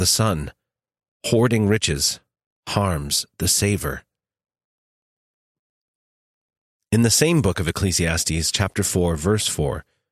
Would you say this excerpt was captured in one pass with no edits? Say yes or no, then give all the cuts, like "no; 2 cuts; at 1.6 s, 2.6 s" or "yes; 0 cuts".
yes; 0 cuts